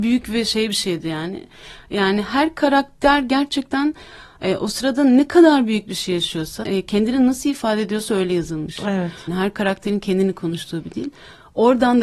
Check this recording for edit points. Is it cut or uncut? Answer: cut